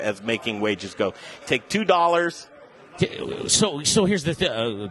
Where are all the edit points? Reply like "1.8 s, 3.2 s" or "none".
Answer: 1.4 s